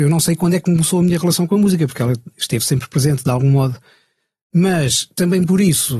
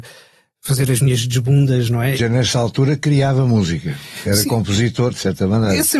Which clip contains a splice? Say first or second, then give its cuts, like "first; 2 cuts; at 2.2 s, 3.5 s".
second; 1 cut; at 2.1 s